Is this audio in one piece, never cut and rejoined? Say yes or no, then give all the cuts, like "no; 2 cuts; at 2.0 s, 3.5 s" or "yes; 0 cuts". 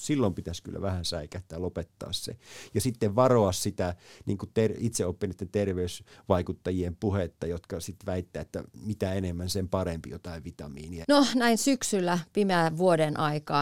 no; 1 cut; at 11.0 s